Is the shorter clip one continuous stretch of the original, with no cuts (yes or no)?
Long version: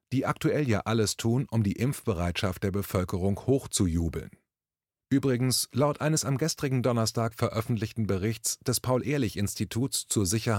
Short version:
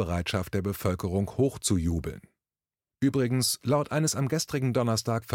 yes